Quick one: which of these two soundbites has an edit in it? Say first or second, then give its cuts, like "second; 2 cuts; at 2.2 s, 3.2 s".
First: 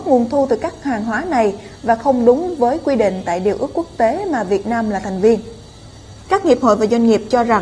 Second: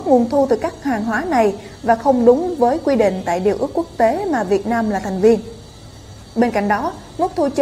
first; 1 cut; at 6.2 s